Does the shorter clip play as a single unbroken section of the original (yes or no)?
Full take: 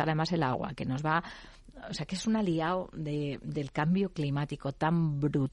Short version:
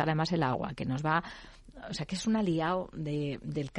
yes